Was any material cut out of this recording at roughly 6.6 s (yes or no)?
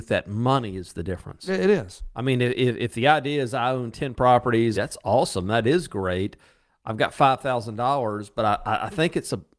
no